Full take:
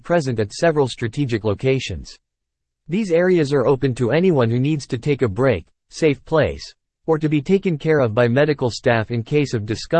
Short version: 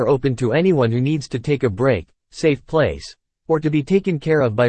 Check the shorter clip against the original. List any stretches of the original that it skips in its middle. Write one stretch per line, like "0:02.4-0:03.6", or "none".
none